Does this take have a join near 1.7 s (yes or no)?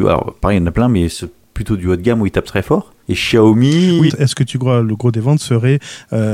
no